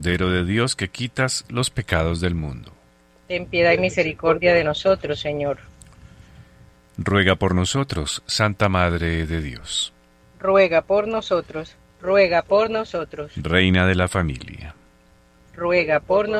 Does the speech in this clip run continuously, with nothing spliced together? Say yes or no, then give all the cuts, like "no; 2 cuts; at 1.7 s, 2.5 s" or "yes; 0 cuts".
no; 2 cuts; at 10.2 s, 11.8 s